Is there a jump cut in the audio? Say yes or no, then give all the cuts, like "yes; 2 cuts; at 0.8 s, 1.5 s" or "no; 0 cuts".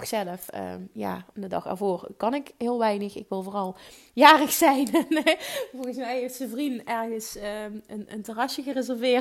no; 0 cuts